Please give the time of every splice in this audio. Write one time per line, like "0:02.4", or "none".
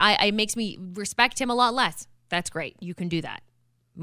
none